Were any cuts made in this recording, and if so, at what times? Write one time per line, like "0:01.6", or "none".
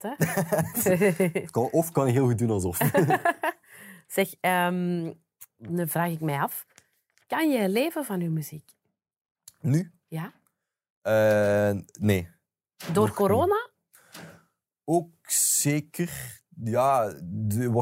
none